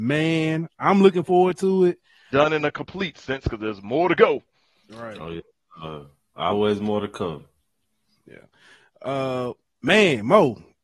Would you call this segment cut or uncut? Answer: cut